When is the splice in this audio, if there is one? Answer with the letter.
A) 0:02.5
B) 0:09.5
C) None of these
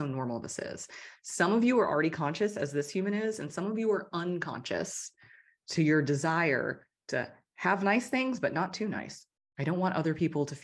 B